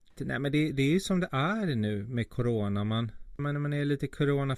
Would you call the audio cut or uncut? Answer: cut